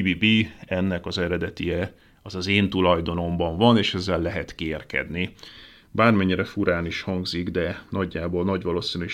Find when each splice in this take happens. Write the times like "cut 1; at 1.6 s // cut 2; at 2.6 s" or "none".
none